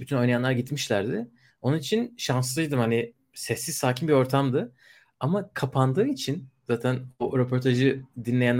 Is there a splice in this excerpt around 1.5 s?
no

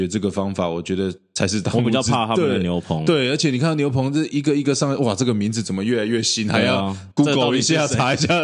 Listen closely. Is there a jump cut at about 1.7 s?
no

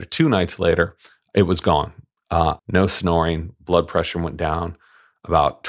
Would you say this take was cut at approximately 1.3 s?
no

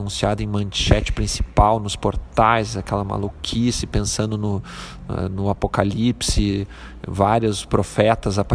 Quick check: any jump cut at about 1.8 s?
no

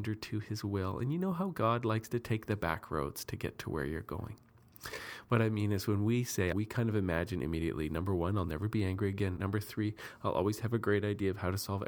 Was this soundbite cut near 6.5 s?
yes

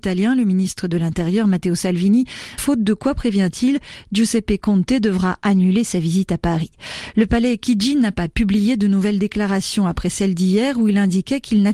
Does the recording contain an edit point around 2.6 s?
yes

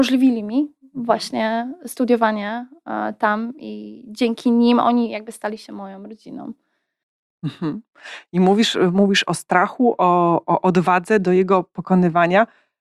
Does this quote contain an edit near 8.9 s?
no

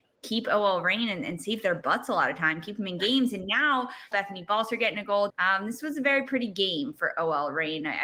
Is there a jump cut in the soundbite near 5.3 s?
yes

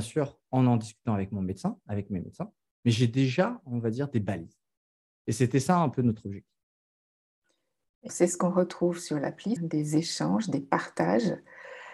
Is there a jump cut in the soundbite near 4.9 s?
no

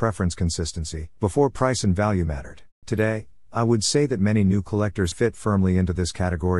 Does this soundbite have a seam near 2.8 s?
yes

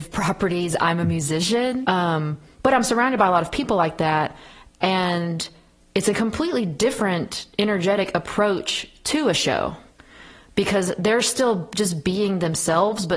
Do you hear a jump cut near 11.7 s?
no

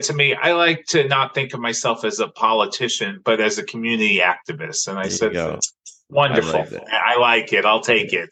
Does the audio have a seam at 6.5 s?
no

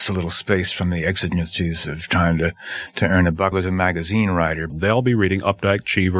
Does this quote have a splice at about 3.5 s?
yes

